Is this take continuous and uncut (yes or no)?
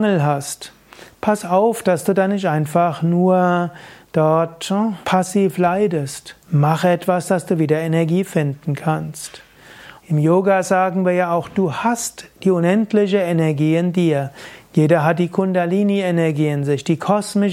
no